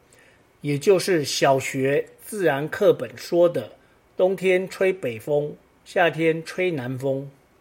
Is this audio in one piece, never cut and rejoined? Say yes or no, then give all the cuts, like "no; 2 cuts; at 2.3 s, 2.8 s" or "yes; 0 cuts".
yes; 0 cuts